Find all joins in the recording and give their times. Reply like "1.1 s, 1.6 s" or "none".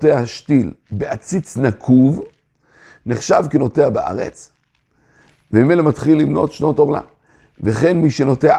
none